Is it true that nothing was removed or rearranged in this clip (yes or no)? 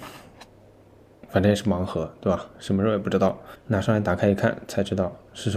yes